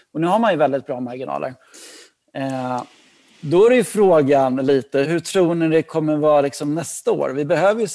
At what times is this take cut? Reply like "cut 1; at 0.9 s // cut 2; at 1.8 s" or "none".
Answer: cut 1; at 5.0 s